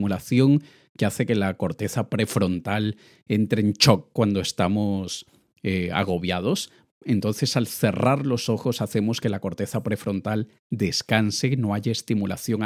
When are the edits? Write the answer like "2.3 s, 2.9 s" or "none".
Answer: none